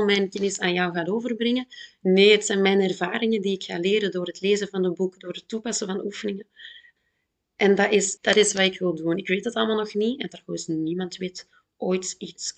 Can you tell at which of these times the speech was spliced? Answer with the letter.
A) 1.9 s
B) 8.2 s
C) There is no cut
B